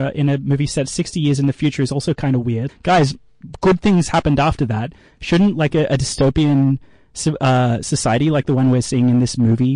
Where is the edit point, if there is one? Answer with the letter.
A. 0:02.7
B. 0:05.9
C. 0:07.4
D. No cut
A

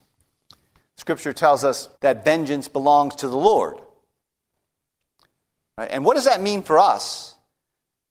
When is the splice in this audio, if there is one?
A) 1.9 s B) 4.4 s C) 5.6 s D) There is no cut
A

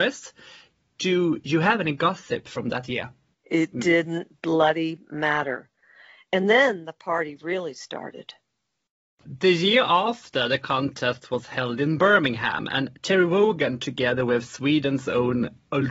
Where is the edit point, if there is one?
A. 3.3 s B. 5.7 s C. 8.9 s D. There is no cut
A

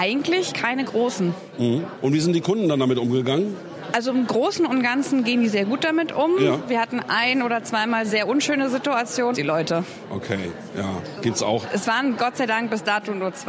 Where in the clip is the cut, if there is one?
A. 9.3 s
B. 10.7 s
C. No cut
A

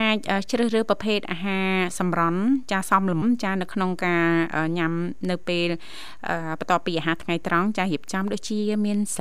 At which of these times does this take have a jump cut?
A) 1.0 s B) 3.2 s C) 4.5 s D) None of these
B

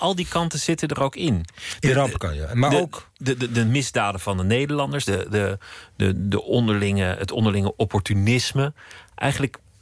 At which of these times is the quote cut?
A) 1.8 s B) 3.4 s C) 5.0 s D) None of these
C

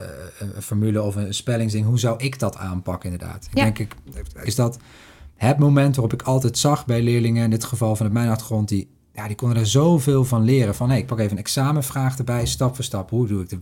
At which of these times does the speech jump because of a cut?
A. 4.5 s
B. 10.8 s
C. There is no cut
A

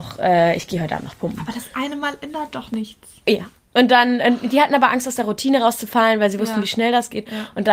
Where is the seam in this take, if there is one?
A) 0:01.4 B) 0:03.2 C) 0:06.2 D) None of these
D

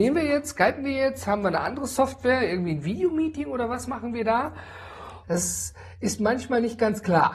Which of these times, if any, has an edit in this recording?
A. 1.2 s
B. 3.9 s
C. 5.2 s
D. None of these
C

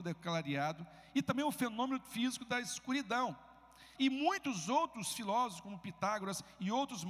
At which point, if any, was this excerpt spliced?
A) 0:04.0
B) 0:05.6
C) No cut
A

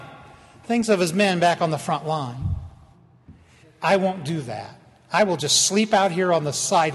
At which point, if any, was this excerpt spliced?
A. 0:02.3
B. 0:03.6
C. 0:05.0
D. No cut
B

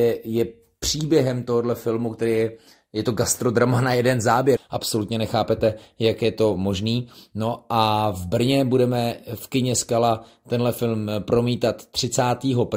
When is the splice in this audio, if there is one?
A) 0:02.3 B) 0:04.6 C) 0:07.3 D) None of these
B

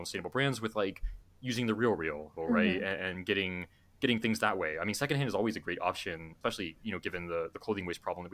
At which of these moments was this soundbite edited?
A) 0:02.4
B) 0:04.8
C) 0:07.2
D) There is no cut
A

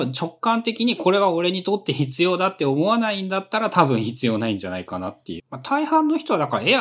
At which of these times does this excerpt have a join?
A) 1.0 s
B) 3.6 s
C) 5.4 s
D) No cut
C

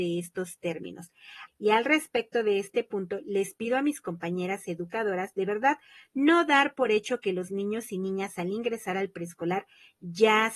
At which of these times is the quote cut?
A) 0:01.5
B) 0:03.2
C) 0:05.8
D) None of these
A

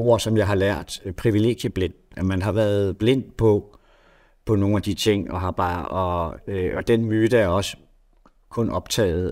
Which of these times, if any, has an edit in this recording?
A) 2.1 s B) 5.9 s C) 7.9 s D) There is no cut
B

